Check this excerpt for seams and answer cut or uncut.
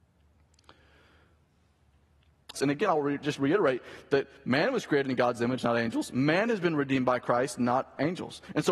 cut